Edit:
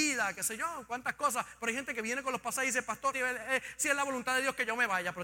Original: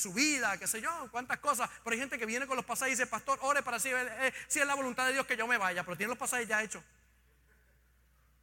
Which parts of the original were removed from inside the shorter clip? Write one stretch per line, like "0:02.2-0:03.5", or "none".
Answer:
0:03.4-0:03.8